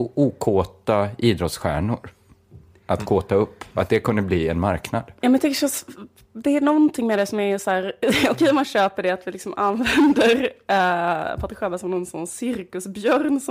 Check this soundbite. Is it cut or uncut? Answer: uncut